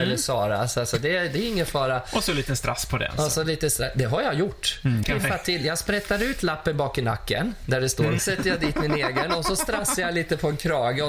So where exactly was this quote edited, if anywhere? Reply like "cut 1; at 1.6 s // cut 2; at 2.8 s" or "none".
cut 1; at 5.0 s // cut 2; at 8.2 s